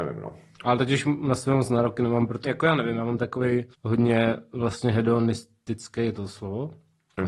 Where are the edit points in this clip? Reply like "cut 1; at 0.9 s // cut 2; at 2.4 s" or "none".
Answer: cut 1; at 2.4 s // cut 2; at 3.7 s